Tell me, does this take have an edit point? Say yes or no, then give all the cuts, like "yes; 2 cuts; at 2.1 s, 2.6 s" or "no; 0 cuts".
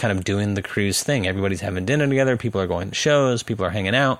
no; 0 cuts